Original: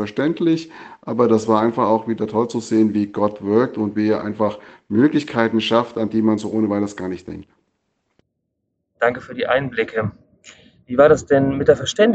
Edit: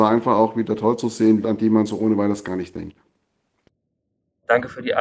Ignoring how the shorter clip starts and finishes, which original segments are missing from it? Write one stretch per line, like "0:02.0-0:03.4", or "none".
0:02.9-0:05.9